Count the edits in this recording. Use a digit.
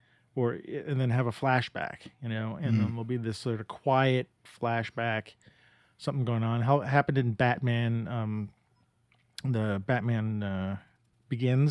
0